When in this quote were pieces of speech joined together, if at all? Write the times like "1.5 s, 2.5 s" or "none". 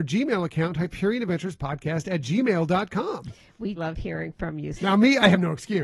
3.8 s, 4.8 s